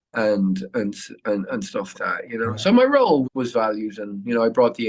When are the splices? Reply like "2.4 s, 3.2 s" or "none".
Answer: 1.9 s, 3.2 s